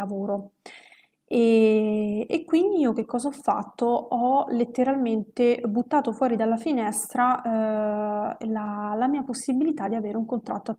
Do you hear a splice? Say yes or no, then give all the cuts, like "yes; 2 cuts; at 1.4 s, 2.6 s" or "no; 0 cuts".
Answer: no; 0 cuts